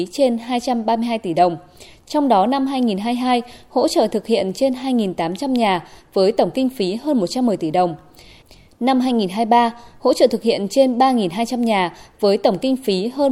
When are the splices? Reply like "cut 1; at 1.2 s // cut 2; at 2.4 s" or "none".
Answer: none

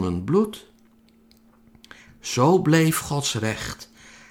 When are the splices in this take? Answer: cut 1; at 2.1 s

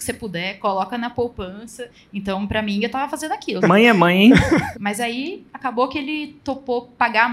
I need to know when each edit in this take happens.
cut 1; at 3.6 s // cut 2; at 4.7 s

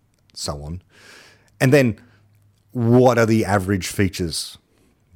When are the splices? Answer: none

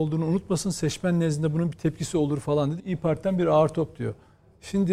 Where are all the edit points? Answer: cut 1; at 2.8 s

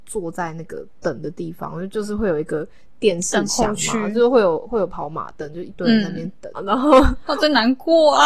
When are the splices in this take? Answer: cut 1; at 6.5 s

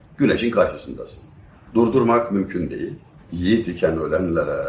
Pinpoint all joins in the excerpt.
cut 1; at 1.7 s // cut 2; at 3.2 s

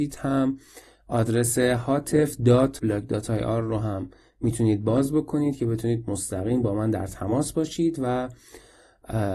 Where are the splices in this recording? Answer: cut 1; at 2.8 s

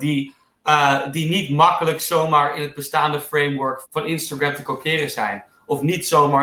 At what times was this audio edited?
cut 1; at 3.8 s

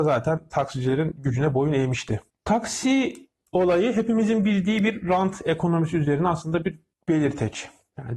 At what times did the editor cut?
none

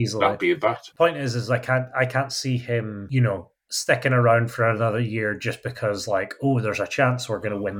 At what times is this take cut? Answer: cut 1; at 0.9 s

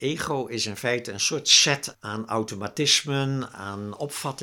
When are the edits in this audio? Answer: cut 1; at 1.9 s

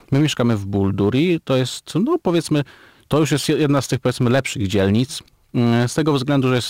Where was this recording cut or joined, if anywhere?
none

